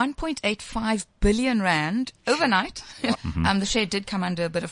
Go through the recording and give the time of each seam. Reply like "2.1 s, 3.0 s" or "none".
3.1 s